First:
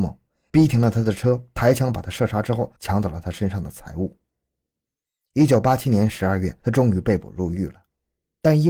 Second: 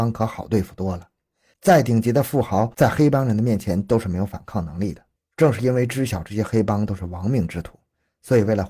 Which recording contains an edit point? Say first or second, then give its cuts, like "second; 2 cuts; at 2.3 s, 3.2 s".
second; 1 cut; at 5.2 s